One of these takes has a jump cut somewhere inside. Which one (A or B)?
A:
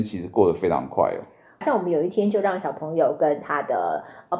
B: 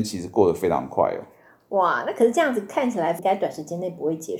A